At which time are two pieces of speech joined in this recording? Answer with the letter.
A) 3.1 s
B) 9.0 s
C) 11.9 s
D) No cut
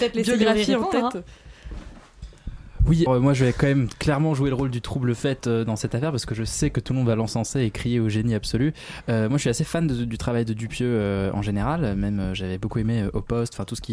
A